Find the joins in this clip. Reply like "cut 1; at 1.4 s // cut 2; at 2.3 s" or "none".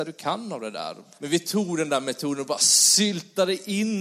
cut 1; at 1.2 s